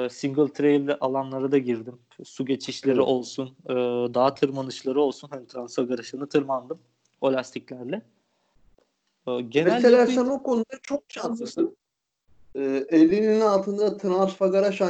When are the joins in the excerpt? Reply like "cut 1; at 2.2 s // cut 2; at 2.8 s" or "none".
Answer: none